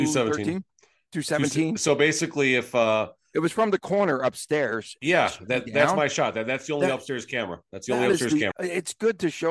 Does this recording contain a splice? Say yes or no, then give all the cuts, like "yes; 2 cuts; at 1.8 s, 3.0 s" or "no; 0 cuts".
yes; 1 cut; at 8.5 s